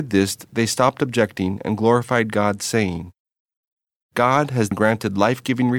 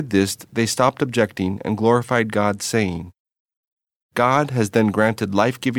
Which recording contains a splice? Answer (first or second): first